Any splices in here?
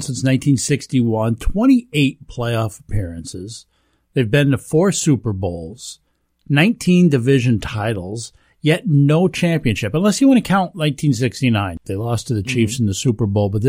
yes; 1 cut; at 11.8 s

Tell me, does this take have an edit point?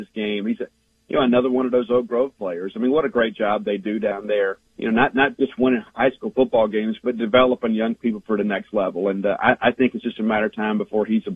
yes; 1 cut; at 4.7 s

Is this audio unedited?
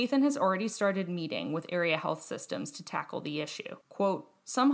no; 1 cut; at 3.8 s

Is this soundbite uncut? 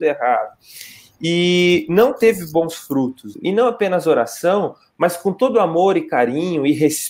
no; 1 cut; at 3.3 s

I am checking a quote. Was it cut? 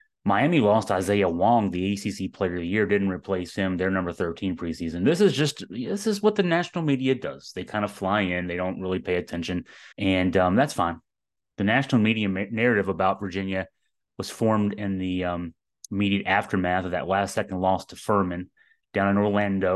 yes; 1 cut; at 9.9 s

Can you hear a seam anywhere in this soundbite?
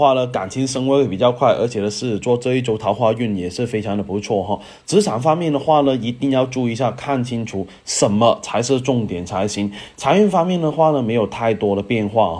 no; 0 cuts

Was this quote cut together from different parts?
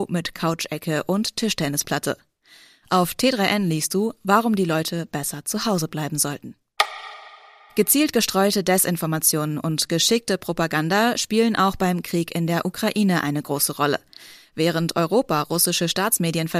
no; 0 cuts

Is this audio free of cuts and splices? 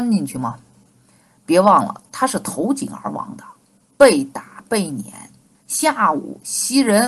no; 1 cut; at 5.5 s

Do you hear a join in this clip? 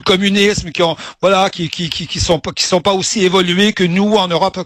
no; 0 cuts

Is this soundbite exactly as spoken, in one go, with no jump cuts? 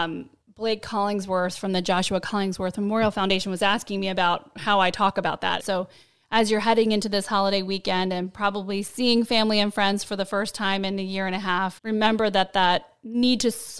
no; 2 cuts; at 5.6 s, 11.8 s

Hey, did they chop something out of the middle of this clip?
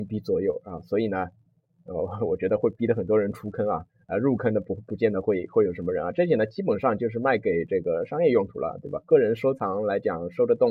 no; 0 cuts

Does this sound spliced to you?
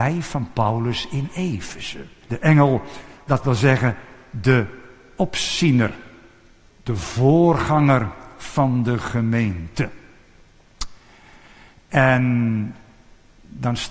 yes; 2 cuts; at 2.2 s, 6.7 s

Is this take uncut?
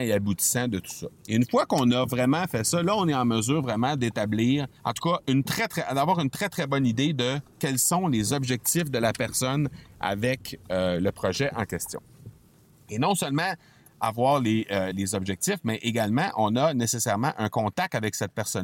no; 2 cuts; at 4.8 s, 14.9 s

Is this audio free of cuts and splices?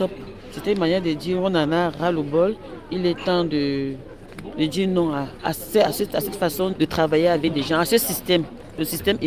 no; 1 cut; at 6.7 s

